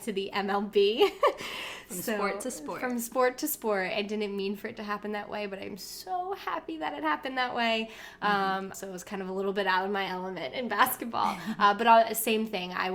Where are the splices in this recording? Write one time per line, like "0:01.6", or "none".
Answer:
0:08.7

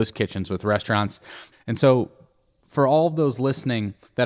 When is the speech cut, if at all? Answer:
0:01.5

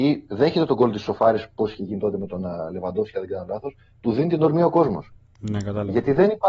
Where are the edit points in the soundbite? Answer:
none

